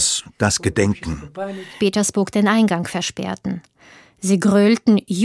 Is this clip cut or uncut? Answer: cut